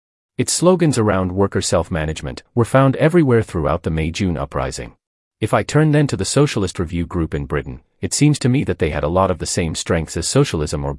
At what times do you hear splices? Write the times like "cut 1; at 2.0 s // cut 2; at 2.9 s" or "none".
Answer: cut 1; at 2.5 s // cut 2; at 5.2 s